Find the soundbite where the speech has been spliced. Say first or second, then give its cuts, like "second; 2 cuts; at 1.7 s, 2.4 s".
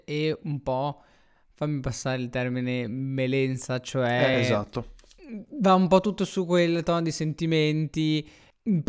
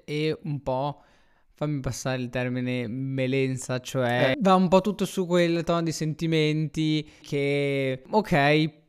second; 2 cuts; at 4.3 s, 7.2 s